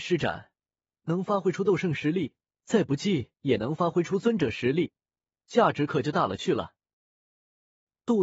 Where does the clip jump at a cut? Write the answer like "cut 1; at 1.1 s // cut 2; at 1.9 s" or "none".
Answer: none